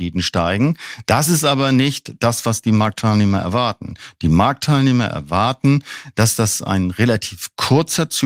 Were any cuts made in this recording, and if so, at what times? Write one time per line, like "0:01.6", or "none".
none